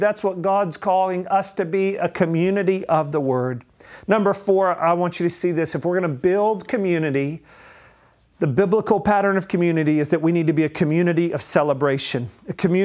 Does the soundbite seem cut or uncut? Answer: uncut